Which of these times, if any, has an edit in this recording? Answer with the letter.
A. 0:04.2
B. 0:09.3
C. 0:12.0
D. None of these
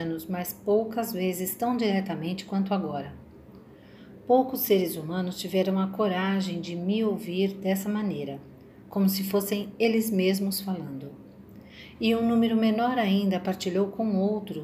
D